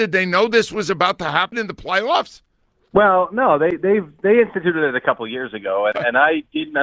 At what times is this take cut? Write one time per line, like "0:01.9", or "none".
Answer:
none